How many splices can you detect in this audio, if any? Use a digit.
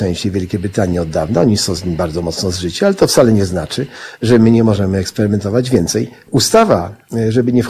1